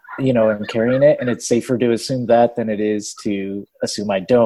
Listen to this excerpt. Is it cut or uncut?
uncut